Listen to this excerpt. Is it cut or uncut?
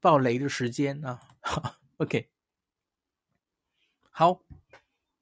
uncut